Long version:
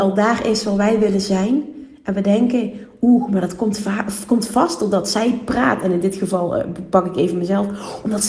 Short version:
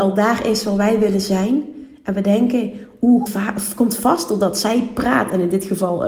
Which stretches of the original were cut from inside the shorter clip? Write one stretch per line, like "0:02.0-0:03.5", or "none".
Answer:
0:03.3-0:03.8